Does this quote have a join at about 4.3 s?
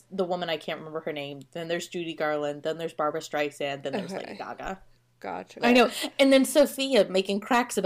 no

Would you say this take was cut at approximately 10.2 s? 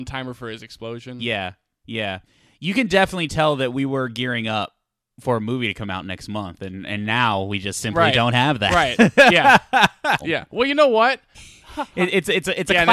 yes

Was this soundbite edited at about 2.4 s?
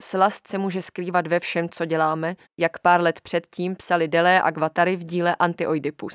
yes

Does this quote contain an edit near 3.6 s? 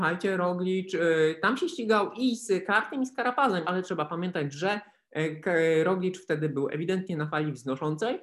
yes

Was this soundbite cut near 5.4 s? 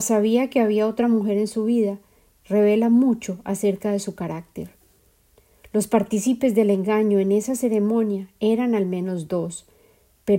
no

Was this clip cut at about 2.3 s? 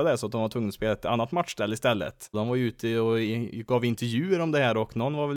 yes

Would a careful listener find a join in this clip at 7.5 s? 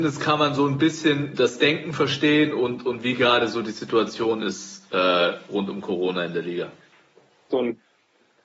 yes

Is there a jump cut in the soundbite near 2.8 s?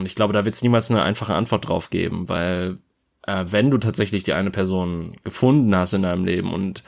no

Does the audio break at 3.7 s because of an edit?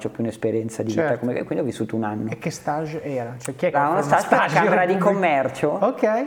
yes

